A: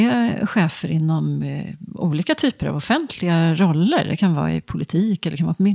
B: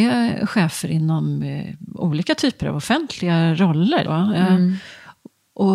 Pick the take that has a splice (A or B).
B